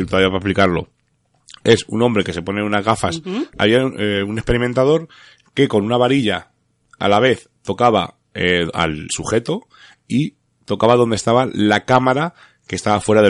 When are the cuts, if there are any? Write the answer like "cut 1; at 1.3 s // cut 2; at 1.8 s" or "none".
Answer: cut 1; at 3.5 s // cut 2; at 9.1 s